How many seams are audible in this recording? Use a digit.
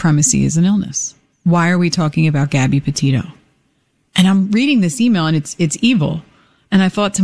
0